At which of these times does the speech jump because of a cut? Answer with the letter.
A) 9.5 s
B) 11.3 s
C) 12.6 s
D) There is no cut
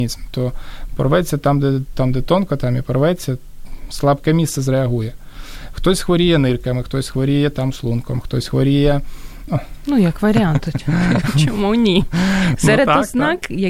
A